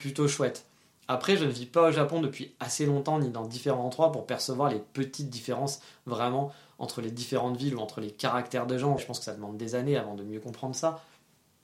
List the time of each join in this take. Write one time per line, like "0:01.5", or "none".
0:09.0